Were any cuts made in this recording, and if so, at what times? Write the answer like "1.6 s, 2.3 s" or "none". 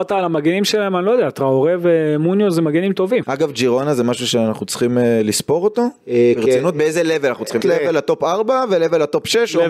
3.2 s, 7.6 s